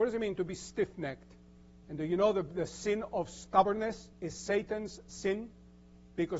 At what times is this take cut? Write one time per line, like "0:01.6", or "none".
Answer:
0:01.8
0:04.1